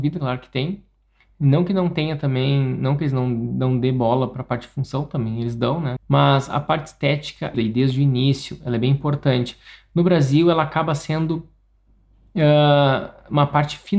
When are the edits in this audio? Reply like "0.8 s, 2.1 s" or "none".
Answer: 6.0 s, 7.5 s